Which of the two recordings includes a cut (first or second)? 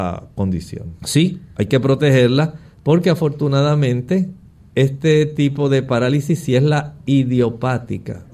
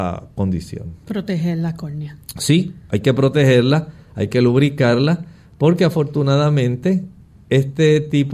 first